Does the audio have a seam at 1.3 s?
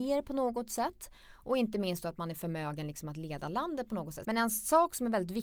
no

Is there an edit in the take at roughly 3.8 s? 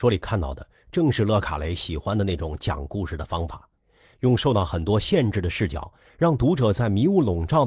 no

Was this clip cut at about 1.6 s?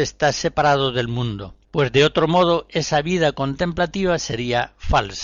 yes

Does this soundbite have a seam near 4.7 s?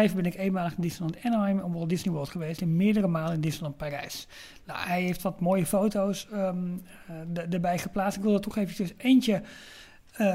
no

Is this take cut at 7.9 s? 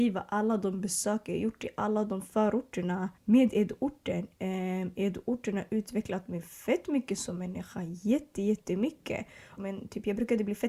no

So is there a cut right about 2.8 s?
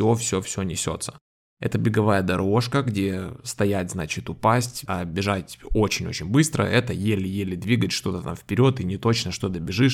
no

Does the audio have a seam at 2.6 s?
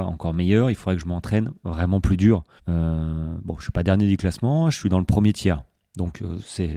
yes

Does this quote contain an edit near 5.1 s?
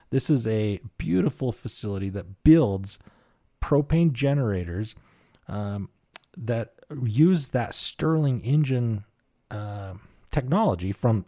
no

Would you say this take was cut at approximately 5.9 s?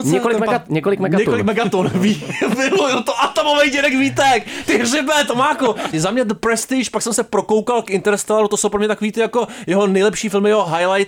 yes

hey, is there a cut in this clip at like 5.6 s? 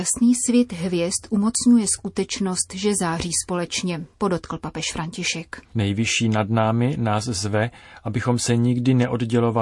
yes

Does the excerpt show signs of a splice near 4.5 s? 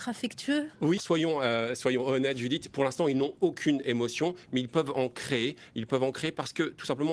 no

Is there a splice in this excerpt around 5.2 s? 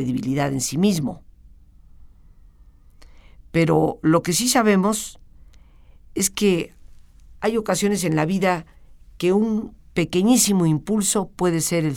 no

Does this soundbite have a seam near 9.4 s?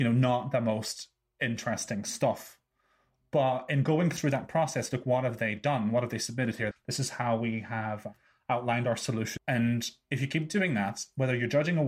yes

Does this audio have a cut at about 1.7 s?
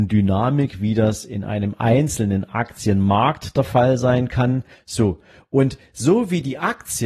no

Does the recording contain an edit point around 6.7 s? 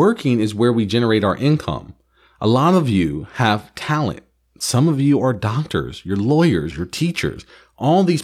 yes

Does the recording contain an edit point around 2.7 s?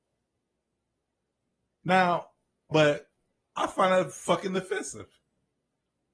yes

